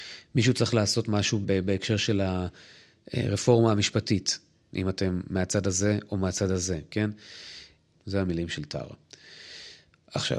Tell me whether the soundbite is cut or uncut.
cut